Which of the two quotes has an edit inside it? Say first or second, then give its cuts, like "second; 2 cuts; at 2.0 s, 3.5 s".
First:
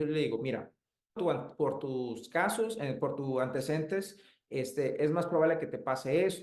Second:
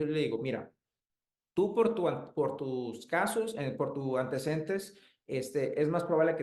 first; 1 cut; at 1.2 s